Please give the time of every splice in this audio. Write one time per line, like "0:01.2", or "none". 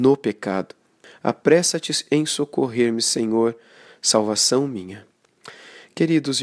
0:01.0